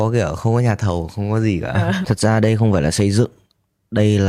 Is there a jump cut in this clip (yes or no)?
yes